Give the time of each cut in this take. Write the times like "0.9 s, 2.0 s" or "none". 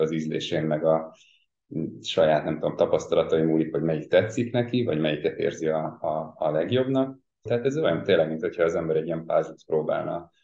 7.5 s